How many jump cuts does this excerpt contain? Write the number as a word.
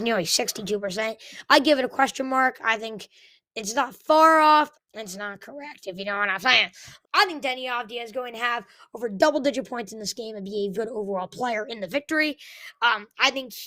three